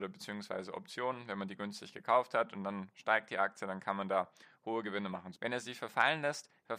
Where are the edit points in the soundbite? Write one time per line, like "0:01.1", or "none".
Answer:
0:05.3